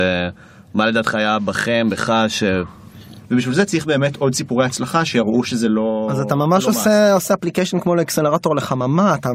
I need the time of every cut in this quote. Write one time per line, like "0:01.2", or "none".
0:03.2